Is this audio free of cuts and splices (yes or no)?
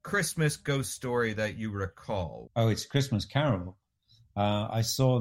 no